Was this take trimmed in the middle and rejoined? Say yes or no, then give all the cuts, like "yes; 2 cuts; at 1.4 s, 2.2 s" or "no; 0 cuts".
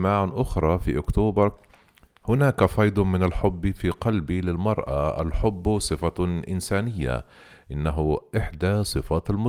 no; 0 cuts